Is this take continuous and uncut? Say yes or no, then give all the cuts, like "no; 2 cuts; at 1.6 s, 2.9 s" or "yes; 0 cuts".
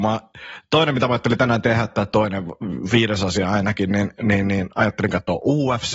yes; 0 cuts